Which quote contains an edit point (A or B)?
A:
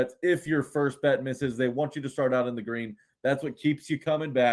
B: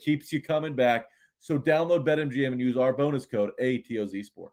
A